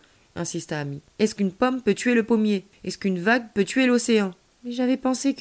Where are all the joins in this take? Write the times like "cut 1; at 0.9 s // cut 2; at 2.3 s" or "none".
none